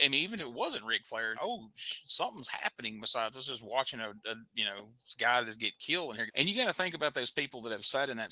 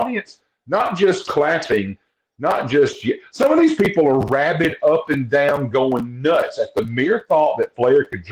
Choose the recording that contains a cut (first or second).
first